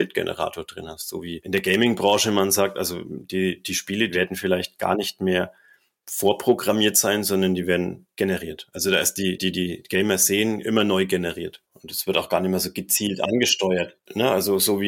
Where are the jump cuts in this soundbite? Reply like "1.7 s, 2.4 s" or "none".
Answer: 9.4 s, 11.7 s